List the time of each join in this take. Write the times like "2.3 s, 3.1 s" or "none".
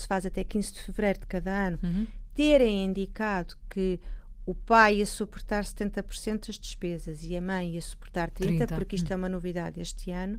none